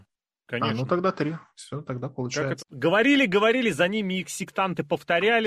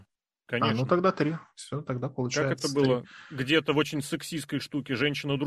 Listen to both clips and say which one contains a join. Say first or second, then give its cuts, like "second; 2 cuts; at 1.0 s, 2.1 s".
first; 1 cut; at 2.6 s